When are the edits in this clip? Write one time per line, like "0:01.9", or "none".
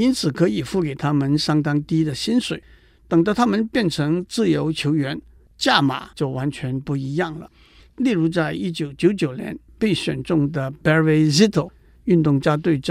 none